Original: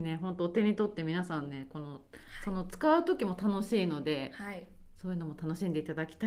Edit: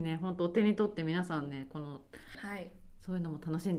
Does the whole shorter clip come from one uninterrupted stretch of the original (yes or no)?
no